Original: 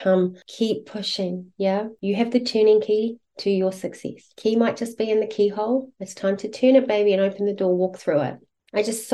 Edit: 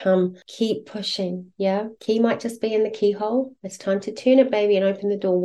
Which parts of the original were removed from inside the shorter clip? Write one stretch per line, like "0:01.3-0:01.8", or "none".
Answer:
0:02.0-0:04.3